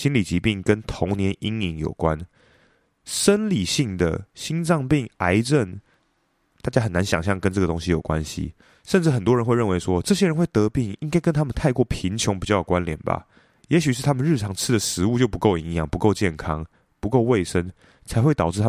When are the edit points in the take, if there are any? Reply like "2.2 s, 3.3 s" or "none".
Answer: none

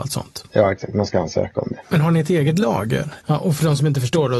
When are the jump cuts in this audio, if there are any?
1.8 s, 3.2 s

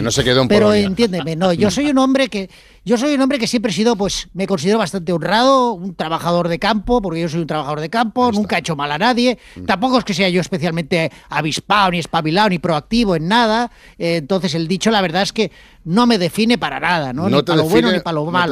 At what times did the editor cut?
none

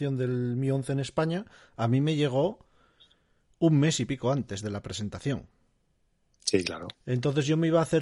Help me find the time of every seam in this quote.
6.9 s

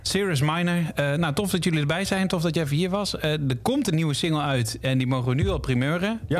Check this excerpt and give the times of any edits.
none

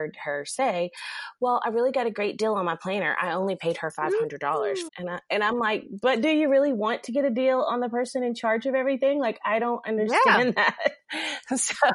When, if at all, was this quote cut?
4.9 s

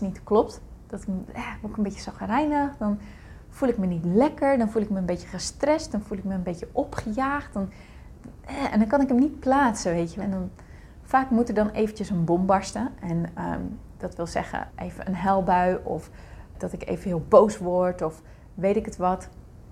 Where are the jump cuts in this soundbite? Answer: 10.2 s, 14.7 s, 16.5 s

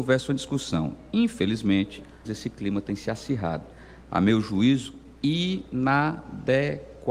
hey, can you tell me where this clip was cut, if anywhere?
2.2 s

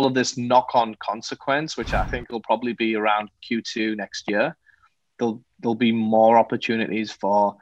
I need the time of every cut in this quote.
none

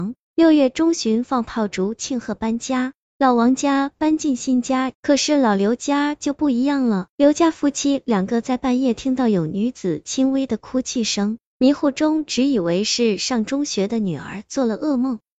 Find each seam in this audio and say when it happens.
4.9 s, 7.1 s

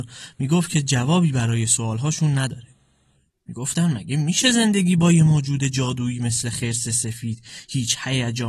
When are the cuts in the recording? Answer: 3.3 s

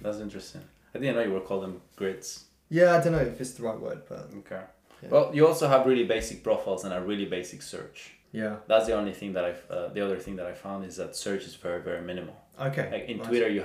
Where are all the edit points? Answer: none

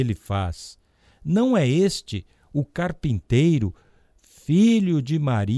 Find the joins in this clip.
none

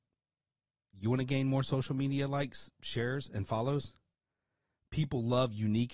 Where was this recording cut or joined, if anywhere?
none

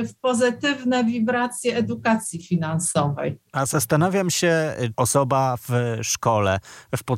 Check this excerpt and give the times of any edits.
4.9 s

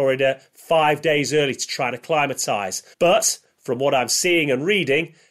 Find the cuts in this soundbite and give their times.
2.9 s

